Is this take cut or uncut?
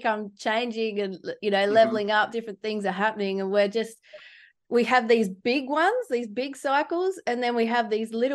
uncut